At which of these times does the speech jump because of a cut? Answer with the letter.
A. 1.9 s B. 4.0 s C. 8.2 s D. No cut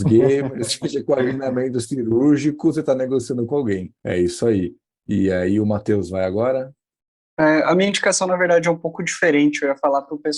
B